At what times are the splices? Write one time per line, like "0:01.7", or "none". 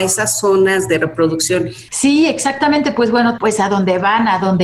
0:01.9
0:03.4